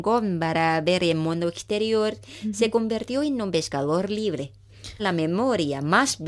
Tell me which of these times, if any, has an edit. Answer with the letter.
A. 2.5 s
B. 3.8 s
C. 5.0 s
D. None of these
C